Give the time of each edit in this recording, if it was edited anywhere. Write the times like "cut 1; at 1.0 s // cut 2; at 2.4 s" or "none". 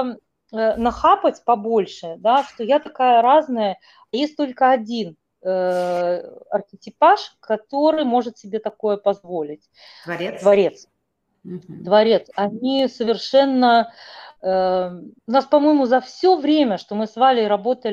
cut 1; at 15.2 s